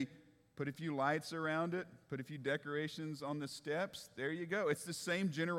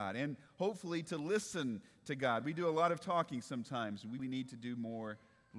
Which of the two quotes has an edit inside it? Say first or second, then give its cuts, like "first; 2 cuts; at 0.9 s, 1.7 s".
second; 1 cut; at 4.2 s